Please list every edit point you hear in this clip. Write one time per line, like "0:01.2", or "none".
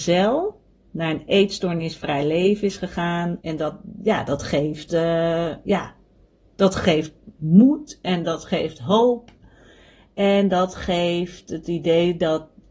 0:03.4

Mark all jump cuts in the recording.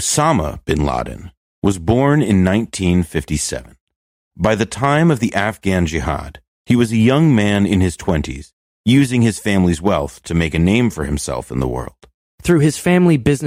0:12.3

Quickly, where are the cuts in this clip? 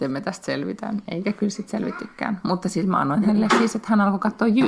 none

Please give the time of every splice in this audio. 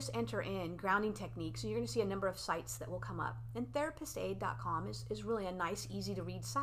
none

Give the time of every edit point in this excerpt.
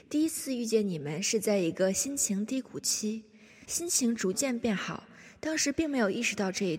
0:03.7

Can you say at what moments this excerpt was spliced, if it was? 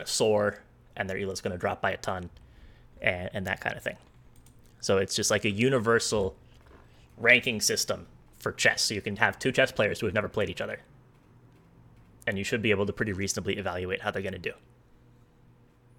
none

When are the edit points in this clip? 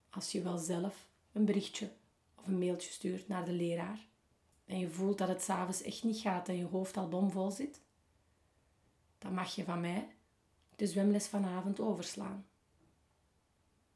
0:04.5

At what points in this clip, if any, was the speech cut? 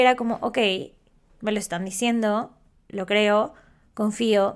none

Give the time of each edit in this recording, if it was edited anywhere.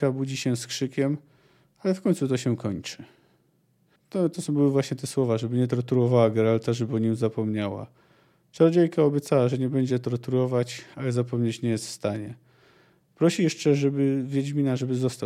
0:04.0

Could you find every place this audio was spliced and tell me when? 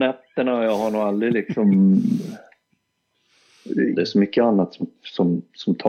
0:03.9

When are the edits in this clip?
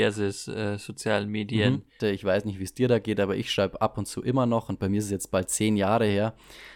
0:02.0

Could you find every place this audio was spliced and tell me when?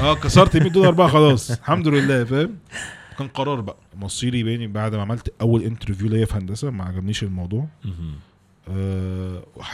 0:02.7
0:03.9

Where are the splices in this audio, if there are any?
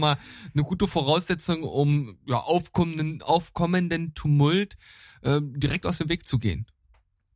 none

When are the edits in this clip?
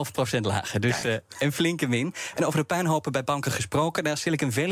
none

